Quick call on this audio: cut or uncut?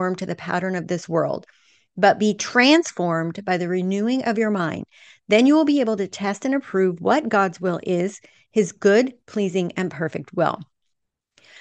uncut